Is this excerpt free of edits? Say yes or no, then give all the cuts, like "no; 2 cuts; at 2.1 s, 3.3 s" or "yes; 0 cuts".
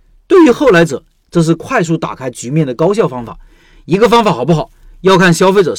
no; 1 cut; at 1.2 s